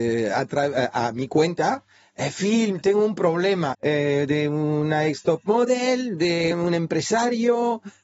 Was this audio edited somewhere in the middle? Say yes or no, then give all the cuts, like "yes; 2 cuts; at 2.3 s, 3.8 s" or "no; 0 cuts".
yes; 2 cuts; at 3.7 s, 6.5 s